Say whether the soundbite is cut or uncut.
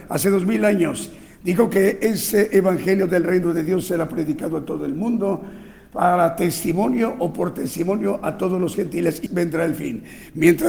cut